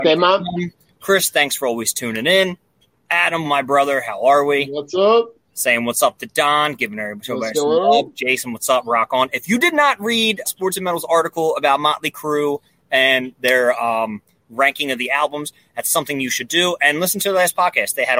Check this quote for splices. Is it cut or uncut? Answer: cut